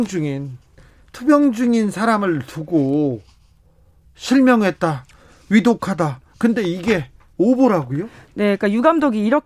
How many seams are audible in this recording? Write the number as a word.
zero